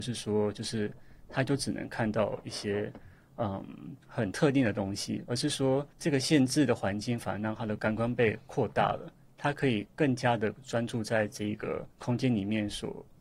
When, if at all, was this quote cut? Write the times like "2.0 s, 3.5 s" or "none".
4.0 s, 5.9 s, 11.9 s

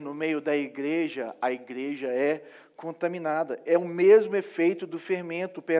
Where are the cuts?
none

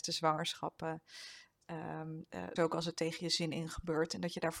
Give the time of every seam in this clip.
2.6 s

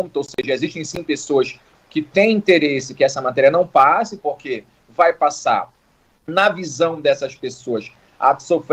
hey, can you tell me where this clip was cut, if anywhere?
none

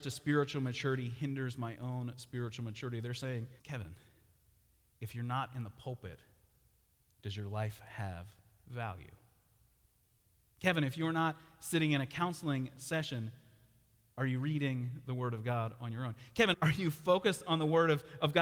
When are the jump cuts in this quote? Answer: 3.6 s, 16.5 s

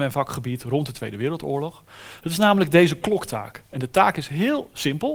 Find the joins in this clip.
2.2 s

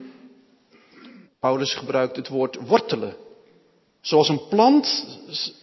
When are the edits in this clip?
1.2 s

